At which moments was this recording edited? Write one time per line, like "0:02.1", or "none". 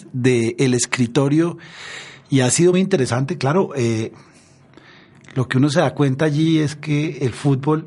0:02.7

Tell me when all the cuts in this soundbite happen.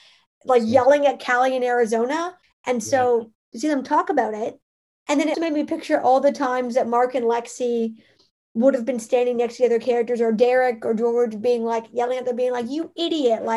0:02.4
0:05.3

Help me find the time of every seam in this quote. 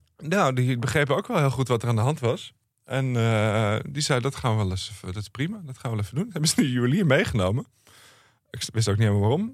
none

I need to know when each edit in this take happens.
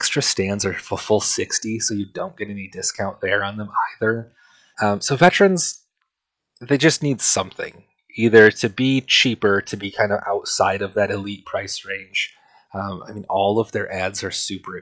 0:04.7

